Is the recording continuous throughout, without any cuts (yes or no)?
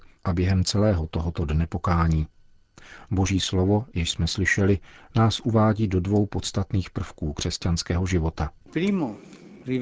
yes